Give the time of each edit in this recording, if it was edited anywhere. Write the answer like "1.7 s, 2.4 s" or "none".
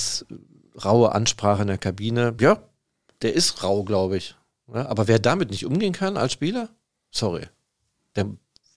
none